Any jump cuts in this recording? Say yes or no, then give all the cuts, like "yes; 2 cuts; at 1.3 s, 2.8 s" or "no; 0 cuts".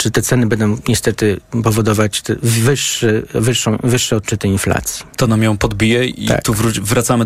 no; 0 cuts